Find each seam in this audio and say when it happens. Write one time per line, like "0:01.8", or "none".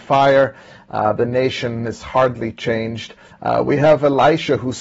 0:03.3